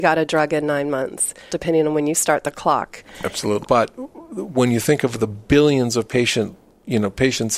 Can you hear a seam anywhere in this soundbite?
yes; 2 cuts; at 1.5 s, 3.6 s

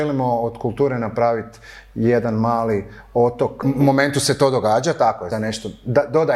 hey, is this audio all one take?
no; 2 cuts; at 3.6 s, 5.3 s

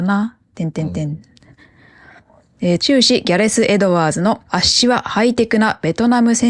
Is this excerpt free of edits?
no; 2 cuts; at 2.8 s, 4.4 s

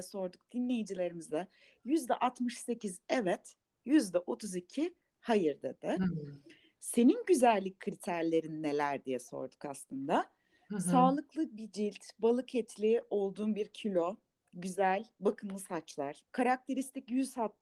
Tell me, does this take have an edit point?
no; 0 cuts

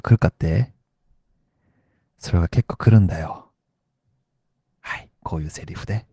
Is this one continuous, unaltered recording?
yes; 0 cuts

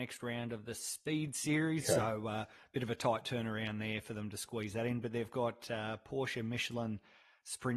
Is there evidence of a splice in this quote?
yes; 1 cut; at 1.8 s

